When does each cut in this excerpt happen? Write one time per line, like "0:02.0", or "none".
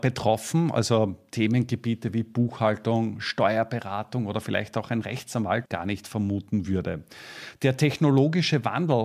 0:05.7
0:07.5